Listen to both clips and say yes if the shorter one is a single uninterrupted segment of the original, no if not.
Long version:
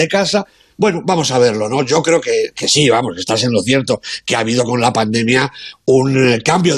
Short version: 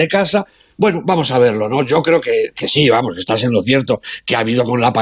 yes